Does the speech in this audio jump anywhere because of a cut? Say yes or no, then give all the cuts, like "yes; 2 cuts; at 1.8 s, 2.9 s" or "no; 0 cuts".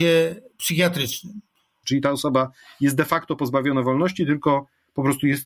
yes; 1 cut; at 1.8 s